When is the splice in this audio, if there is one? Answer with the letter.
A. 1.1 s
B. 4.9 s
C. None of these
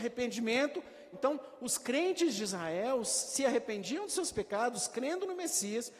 A